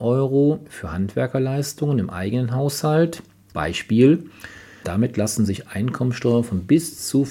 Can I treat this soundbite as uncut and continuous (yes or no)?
no